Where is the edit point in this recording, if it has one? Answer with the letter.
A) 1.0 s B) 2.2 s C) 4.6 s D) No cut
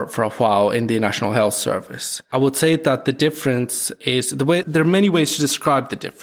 C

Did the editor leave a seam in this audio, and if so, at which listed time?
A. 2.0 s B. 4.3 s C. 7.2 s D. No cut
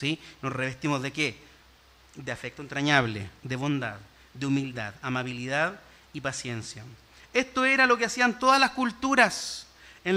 D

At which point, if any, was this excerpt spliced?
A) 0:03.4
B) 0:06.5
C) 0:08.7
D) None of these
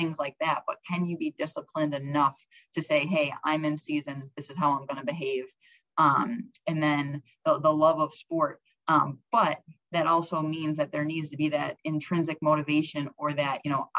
C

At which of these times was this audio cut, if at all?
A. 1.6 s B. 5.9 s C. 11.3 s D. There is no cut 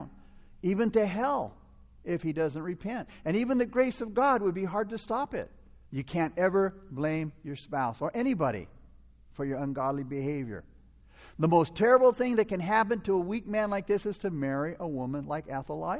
B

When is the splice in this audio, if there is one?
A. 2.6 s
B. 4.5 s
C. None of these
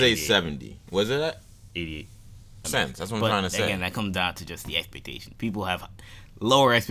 A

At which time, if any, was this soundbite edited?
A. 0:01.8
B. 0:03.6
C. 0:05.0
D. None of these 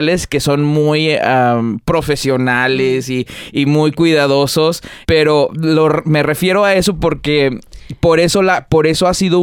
C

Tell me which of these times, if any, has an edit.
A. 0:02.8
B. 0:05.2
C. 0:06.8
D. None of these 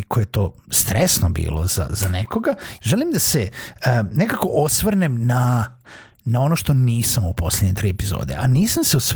A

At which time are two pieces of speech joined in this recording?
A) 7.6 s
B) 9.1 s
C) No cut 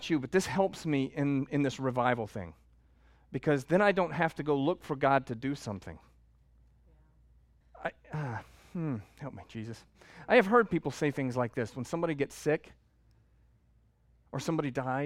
A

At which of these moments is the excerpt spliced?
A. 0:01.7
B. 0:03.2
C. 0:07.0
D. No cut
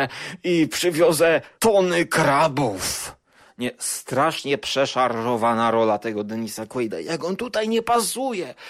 D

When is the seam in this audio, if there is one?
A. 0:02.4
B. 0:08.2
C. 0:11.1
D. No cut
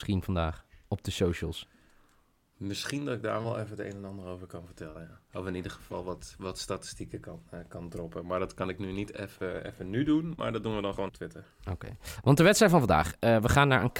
C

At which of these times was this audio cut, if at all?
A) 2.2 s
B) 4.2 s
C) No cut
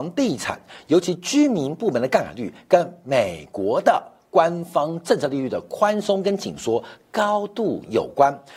C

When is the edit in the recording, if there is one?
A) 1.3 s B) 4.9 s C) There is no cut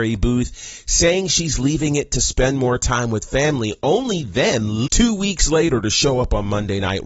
B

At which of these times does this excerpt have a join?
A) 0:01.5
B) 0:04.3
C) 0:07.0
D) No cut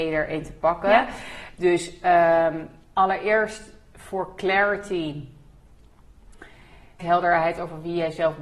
C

